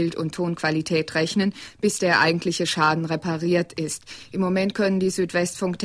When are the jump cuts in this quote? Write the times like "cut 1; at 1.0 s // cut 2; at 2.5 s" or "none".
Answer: none